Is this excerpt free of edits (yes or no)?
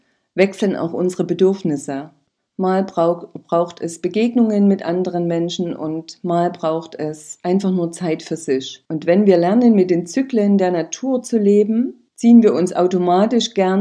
no